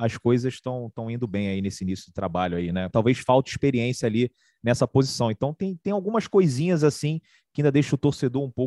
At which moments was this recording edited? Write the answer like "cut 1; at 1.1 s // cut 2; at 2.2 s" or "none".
cut 1; at 2.9 s